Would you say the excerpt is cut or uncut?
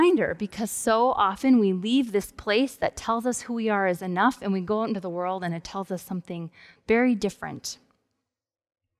uncut